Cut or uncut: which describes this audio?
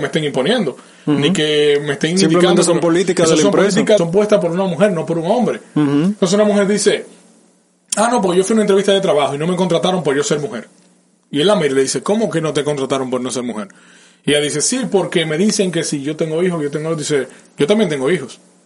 cut